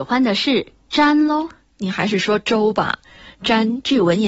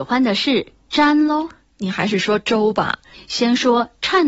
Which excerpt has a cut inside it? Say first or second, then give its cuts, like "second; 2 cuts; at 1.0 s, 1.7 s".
second; 1 cut; at 3.1 s